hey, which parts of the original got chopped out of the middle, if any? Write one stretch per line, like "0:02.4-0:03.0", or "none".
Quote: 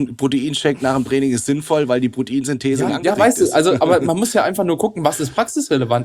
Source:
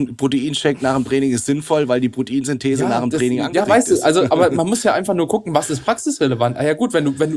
0:02.9-0:03.4